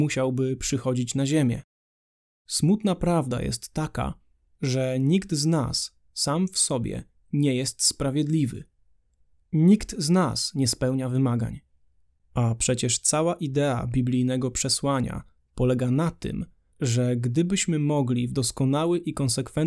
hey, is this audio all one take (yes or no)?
no